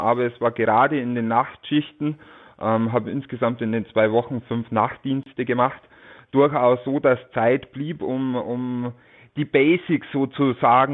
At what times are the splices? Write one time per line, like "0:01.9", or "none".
none